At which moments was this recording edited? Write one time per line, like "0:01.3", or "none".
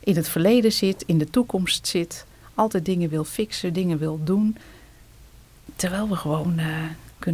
none